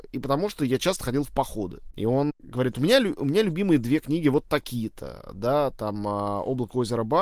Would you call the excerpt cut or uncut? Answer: cut